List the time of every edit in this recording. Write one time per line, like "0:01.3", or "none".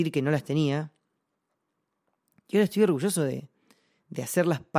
none